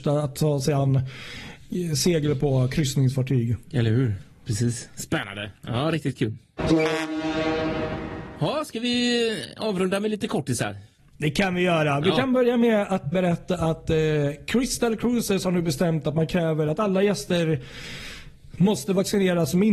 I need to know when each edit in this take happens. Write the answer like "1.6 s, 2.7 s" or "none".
13.1 s